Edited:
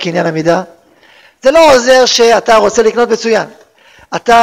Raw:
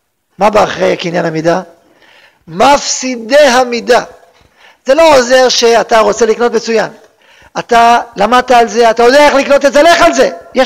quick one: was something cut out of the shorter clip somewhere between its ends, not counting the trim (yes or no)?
yes